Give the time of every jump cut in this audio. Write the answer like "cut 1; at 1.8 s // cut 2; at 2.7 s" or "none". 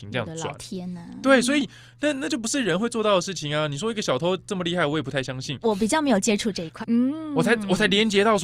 cut 1; at 5.6 s // cut 2; at 6.8 s

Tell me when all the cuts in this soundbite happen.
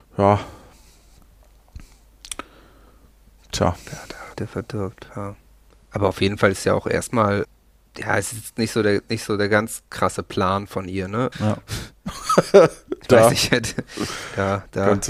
cut 1; at 4.3 s // cut 2; at 11.3 s

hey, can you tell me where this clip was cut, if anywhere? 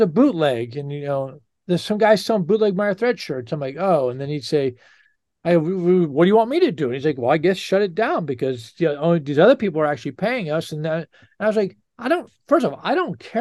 none

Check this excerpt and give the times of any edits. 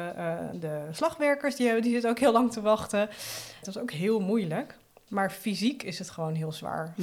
cut 1; at 3.6 s

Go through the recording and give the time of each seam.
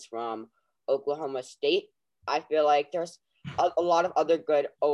none

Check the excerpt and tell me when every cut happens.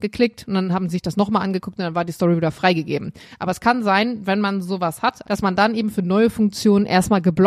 cut 1; at 5.2 s

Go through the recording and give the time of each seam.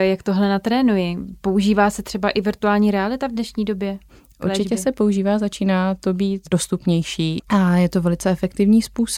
cut 1; at 7.4 s

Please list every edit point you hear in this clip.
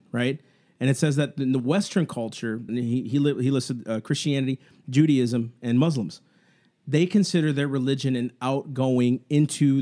cut 1; at 2.7 s

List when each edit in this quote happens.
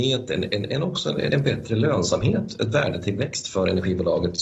cut 1; at 1.3 s

